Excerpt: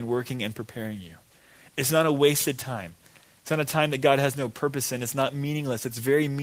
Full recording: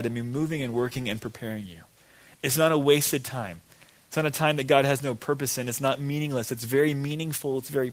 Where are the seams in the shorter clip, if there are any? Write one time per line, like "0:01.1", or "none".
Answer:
none